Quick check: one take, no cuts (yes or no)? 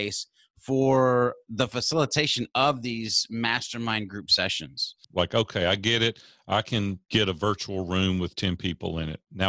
no